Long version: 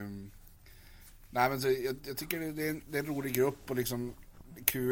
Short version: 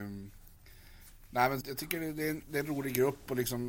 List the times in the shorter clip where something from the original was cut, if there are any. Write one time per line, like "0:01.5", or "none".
0:01.6